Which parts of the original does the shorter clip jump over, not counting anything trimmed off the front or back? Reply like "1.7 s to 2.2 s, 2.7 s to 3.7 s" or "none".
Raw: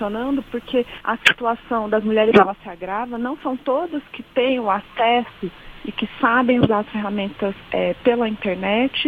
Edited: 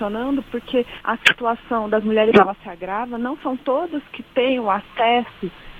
none